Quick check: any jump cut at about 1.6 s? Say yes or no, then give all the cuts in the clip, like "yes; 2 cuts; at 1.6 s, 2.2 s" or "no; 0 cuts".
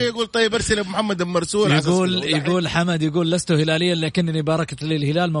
no; 0 cuts